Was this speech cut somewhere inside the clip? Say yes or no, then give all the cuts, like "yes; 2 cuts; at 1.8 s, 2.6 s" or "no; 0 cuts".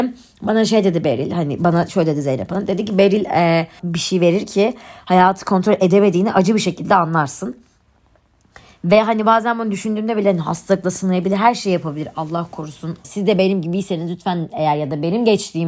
yes; 2 cuts; at 3.8 s, 13.0 s